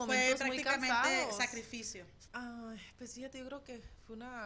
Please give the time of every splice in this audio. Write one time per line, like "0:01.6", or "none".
0:02.3